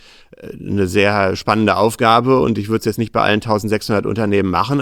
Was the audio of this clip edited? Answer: no; 0 cuts

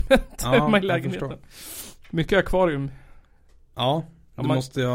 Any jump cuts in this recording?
no; 0 cuts

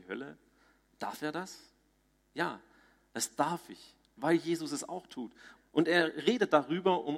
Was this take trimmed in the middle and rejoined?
yes; 1 cut; at 5.6 s

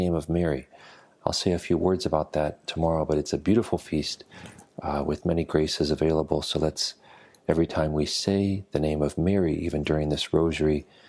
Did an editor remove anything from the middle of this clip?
no; 0 cuts

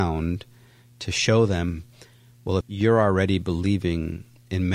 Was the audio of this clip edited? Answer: yes; 1 cut; at 2.6 s

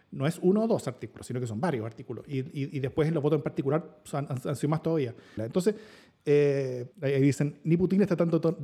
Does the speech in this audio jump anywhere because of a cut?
yes; 2 cuts; at 5.4 s, 6.9 s

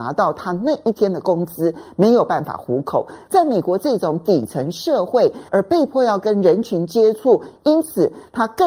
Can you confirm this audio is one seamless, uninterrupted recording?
no; 2 cuts; at 3.3 s, 5.5 s

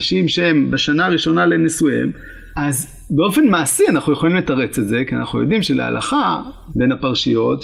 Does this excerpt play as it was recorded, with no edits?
no; 2 cuts; at 2.5 s, 6.7 s

